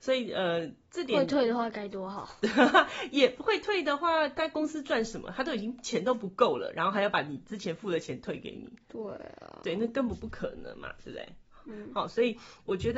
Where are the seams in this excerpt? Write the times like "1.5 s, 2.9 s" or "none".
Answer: none